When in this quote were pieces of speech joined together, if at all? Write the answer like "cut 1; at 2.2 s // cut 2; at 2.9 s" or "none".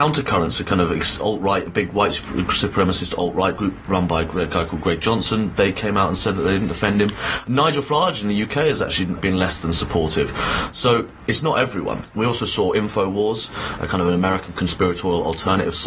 cut 1; at 9.2 s // cut 2; at 12.1 s